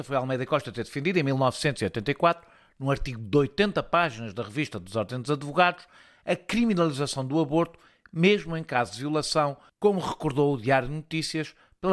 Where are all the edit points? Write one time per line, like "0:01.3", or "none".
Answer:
none